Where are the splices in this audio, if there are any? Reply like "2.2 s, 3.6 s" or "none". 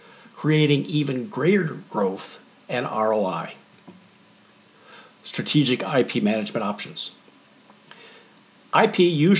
none